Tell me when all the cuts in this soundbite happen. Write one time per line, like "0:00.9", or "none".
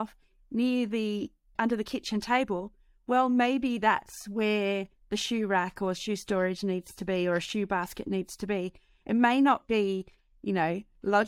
0:01.6

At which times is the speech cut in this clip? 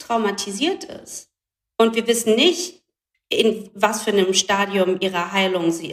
none

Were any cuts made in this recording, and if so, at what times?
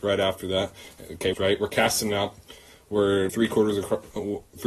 0:01.3
0:03.3

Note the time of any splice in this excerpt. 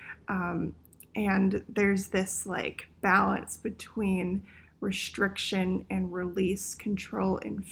0:06.8

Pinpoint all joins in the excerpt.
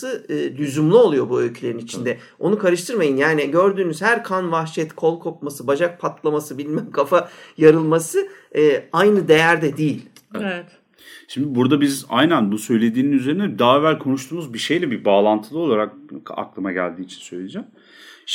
none

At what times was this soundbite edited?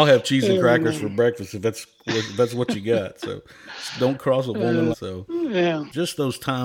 0:04.9

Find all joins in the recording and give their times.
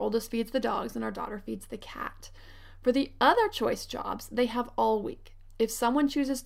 none

